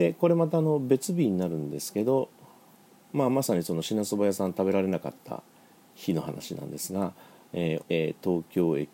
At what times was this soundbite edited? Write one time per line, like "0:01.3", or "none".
0:07.8